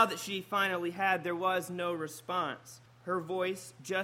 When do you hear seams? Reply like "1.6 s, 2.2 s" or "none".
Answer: 2.9 s